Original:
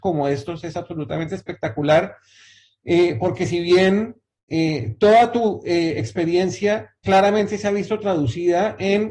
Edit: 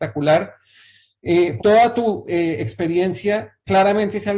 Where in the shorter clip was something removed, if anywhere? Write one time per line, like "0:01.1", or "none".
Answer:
0:01.6